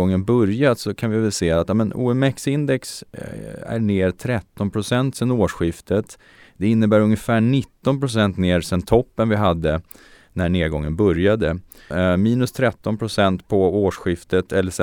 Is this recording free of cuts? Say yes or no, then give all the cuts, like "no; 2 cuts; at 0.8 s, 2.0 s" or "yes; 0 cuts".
no; 1 cut; at 11.9 s